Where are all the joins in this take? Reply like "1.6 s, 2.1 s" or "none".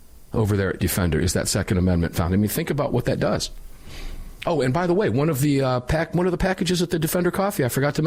4.4 s

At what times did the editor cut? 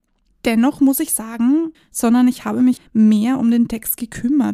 1.7 s, 2.8 s

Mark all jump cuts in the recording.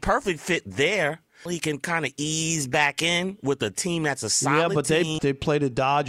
1.5 s, 5.2 s

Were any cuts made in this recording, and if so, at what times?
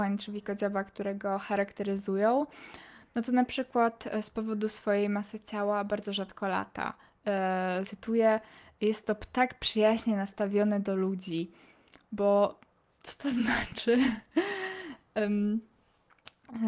7.8 s

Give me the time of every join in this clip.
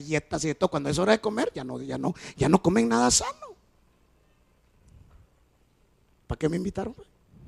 none

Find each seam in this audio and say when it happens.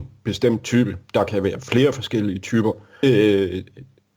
3.0 s

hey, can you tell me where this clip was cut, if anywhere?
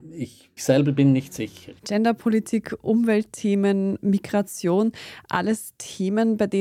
1.8 s

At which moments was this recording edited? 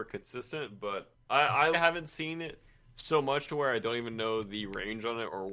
1.7 s

